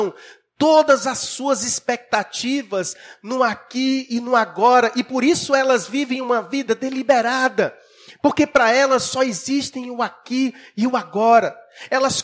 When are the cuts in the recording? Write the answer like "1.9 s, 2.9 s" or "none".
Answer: none